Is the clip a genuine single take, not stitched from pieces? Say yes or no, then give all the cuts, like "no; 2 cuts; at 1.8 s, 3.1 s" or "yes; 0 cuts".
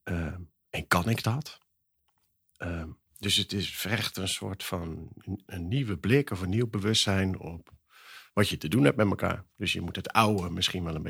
no; 1 cut; at 5.5 s